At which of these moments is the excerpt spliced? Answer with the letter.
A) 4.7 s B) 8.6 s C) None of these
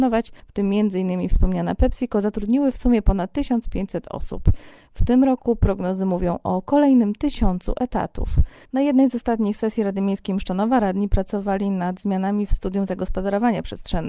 C